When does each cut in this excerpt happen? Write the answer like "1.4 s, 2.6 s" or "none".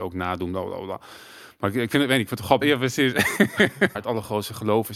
2.6 s, 3.9 s